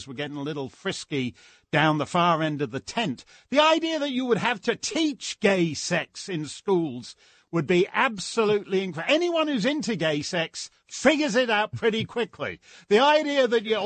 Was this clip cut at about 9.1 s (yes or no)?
no